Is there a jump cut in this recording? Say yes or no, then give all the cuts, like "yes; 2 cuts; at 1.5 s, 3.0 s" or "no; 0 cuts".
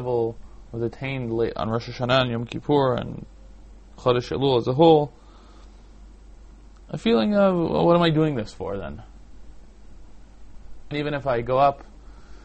yes; 1 cut; at 10.9 s